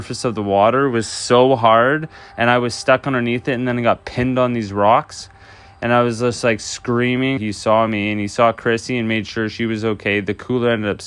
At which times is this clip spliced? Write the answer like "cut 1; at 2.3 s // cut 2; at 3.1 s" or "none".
cut 1; at 7.4 s